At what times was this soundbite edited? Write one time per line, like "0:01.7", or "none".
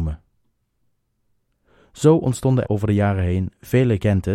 0:02.6